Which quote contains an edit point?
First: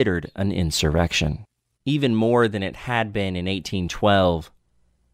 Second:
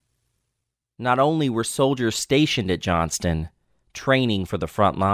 first; 1 cut; at 1.8 s

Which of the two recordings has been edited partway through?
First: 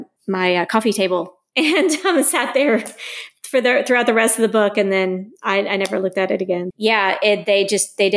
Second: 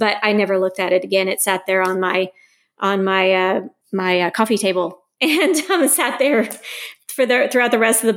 first; 1 cut; at 6.7 s

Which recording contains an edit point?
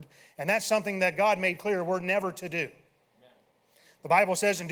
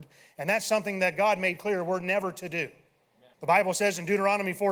second; 1 cut; at 3.3 s

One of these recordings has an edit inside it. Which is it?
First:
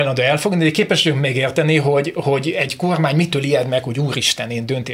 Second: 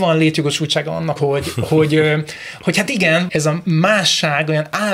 second; 2 cuts; at 1.2 s, 3.3 s

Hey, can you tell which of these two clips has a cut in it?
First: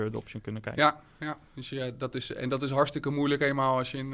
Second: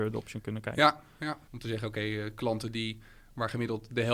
second; 1 cut; at 1.5 s

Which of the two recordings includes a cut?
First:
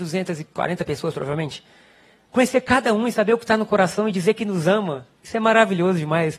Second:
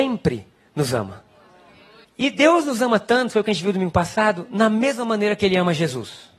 second; 1 cut; at 2.0 s

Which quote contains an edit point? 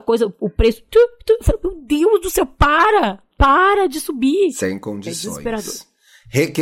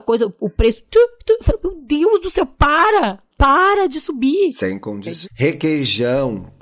second; 1 cut; at 5.2 s

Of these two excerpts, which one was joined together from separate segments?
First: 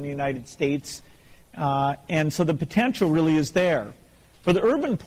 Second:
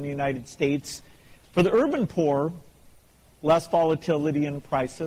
second; 2 cuts; at 1.4 s, 3.3 s

